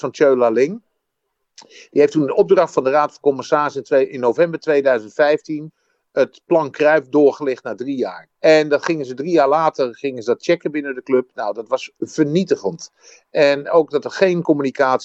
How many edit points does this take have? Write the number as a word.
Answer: one